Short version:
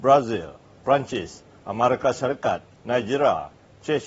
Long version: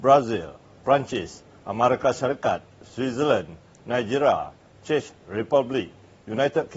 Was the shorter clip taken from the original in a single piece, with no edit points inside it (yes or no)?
no